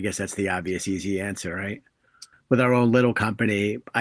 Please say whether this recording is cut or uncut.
cut